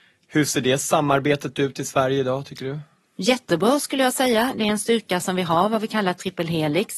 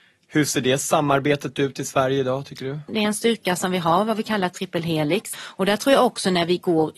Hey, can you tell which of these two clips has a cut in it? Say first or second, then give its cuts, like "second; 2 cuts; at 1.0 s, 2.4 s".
second; 2 cuts; at 2.9 s, 5.3 s